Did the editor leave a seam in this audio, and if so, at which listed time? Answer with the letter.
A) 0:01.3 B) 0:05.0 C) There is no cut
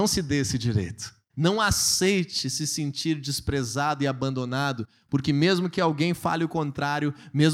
A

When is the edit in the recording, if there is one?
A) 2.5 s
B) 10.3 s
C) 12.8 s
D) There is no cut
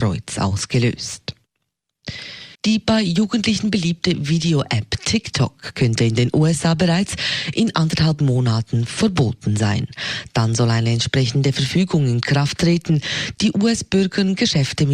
A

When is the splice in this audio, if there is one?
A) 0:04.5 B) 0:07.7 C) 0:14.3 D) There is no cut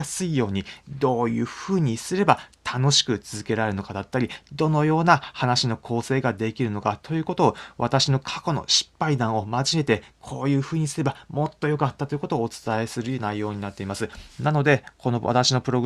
D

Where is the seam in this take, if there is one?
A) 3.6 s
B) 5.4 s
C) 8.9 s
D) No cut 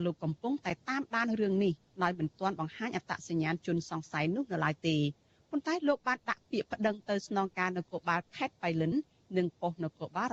D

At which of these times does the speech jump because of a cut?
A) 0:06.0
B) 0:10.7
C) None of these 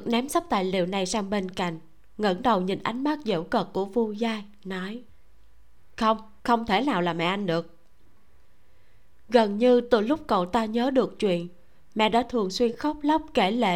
C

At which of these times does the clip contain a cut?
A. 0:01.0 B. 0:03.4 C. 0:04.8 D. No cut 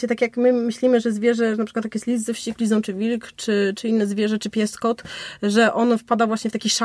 D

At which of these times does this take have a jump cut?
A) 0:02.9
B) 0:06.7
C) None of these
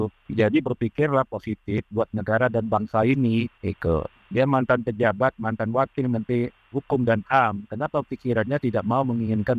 B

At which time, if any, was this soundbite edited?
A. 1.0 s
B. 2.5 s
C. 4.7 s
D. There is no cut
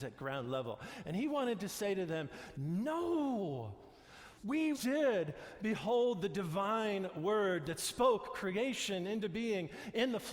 C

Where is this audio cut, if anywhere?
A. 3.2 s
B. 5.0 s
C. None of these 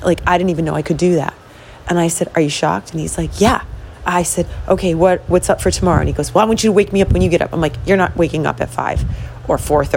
C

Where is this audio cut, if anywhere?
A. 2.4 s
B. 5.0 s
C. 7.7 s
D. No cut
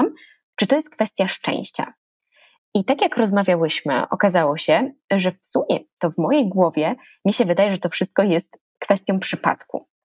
D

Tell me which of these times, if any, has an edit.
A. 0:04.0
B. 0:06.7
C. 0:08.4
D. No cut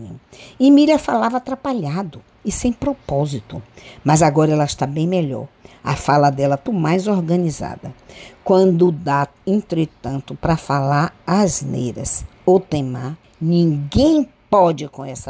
B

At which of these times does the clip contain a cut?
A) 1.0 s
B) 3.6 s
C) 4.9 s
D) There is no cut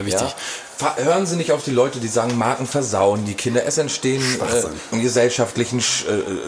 C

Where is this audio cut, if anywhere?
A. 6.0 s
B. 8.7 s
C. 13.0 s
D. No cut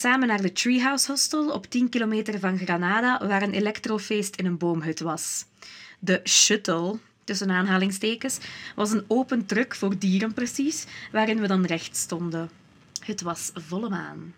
D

